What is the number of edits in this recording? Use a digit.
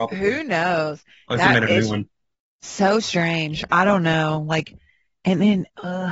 0